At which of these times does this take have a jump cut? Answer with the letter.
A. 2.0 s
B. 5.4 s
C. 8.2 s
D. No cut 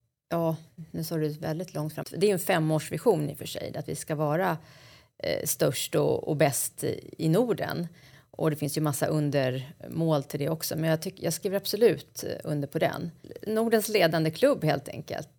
A